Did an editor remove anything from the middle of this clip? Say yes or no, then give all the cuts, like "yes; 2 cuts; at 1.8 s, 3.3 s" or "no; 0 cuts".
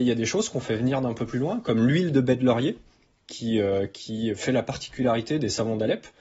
no; 0 cuts